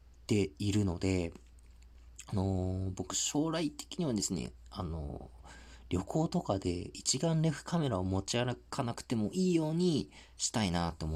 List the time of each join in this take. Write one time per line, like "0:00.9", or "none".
none